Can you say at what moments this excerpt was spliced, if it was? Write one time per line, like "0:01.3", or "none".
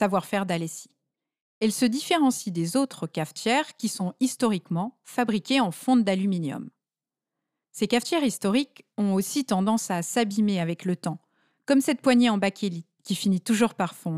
none